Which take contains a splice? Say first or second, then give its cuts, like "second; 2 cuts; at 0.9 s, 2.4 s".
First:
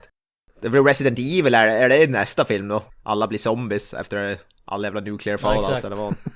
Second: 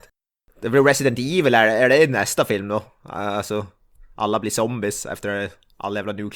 first; 1 cut; at 2.9 s